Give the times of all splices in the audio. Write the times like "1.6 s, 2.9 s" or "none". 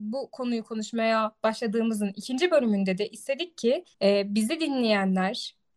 3.9 s